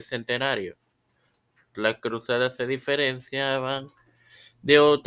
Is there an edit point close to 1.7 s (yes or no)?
yes